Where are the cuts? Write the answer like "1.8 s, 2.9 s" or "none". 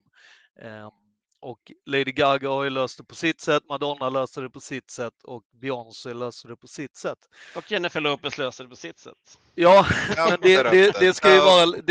none

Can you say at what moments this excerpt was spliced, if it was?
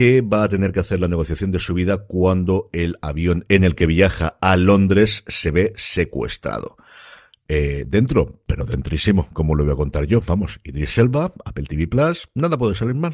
none

